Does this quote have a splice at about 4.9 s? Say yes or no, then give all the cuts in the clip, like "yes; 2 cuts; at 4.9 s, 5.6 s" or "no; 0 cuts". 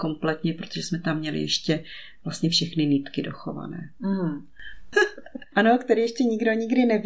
yes; 1 cut; at 4.9 s